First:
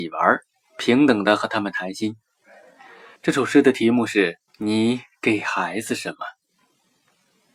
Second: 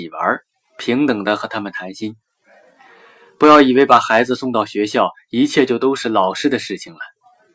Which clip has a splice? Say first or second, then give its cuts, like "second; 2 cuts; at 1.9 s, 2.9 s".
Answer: first; 2 cuts; at 3.2 s, 4.5 s